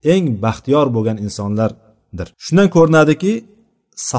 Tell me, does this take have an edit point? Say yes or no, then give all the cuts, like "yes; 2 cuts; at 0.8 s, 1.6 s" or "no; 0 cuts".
yes; 1 cut; at 2.3 s